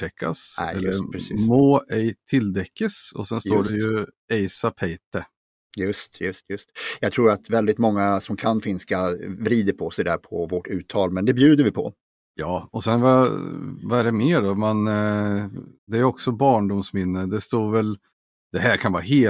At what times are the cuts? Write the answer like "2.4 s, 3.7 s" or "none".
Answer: none